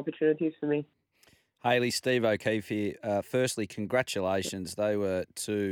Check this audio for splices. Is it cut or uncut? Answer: uncut